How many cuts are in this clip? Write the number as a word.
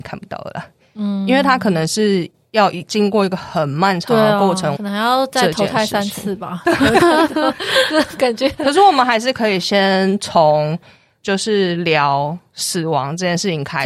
one